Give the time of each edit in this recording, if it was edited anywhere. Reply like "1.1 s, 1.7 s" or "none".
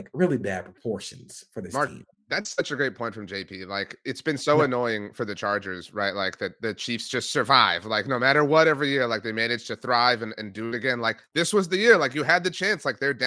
none